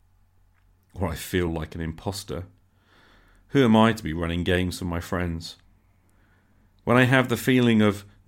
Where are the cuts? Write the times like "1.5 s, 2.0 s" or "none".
none